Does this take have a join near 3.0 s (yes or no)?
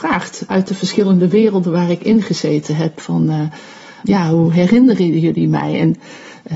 no